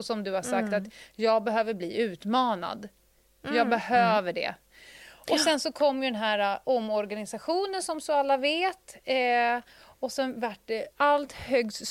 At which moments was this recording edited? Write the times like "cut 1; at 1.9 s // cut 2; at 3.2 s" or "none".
cut 1; at 10.9 s